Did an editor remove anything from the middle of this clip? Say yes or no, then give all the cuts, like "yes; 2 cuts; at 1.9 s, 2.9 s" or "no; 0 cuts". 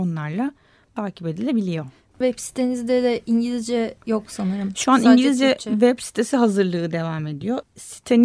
no; 0 cuts